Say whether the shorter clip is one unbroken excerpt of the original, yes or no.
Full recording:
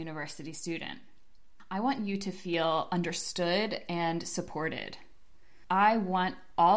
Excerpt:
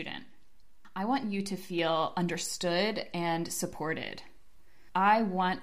yes